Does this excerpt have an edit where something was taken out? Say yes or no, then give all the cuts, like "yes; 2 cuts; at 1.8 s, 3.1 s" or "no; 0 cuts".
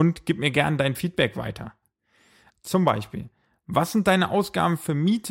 yes; 1 cut; at 2.5 s